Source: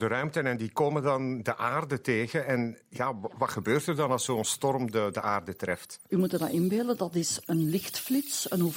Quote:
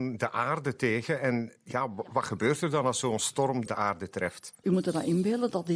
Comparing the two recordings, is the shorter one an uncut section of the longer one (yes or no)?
no